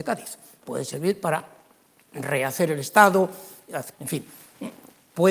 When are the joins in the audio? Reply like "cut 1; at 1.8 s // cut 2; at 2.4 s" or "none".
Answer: cut 1; at 3.9 s